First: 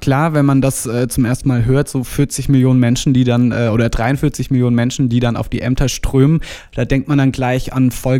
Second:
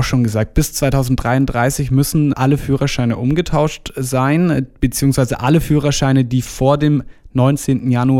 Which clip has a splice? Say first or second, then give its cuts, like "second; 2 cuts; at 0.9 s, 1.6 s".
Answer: second; 1 cut; at 2.3 s